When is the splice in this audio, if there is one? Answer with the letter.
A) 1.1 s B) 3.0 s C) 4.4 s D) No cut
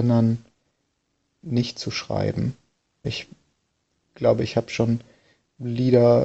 B